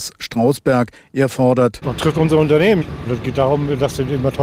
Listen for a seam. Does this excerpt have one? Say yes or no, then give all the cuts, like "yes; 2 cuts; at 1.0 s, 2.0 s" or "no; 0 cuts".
yes; 1 cut; at 1.8 s